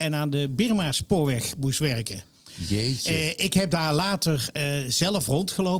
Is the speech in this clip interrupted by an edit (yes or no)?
no